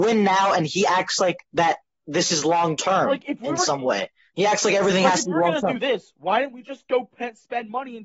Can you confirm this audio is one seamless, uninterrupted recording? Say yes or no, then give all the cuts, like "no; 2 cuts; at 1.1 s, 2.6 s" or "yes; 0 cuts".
yes; 0 cuts